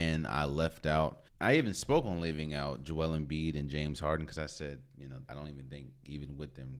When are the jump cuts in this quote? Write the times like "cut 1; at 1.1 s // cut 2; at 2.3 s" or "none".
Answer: cut 1; at 1.3 s // cut 2; at 5.2 s